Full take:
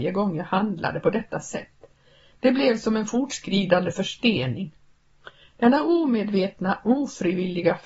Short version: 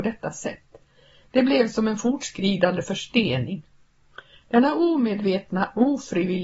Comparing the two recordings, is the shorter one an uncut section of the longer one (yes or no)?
yes